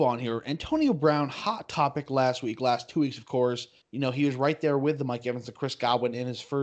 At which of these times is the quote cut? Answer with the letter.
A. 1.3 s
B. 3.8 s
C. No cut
B